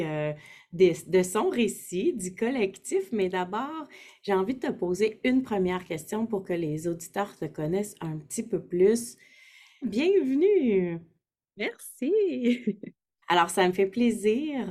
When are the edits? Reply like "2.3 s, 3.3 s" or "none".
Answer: 9.8 s, 13.2 s